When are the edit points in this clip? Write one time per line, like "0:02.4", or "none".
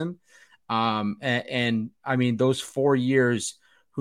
none